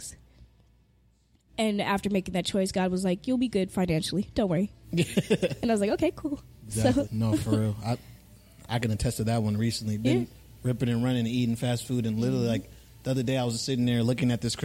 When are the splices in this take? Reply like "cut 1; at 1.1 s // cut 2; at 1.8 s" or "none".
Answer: cut 1; at 7.0 s